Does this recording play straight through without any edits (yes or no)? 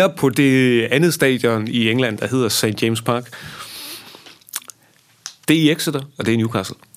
no